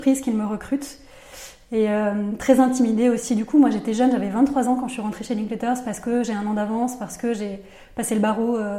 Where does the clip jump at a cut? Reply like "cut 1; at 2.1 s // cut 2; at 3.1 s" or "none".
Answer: none